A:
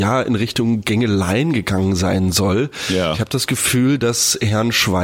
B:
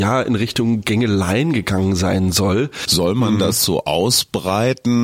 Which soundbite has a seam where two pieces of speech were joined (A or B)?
B